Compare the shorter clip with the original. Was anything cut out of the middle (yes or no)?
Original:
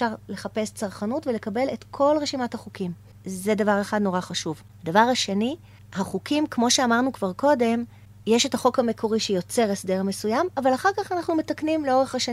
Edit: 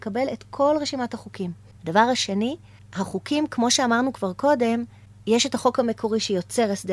yes